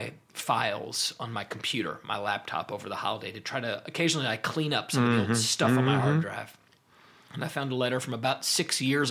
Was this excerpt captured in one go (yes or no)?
yes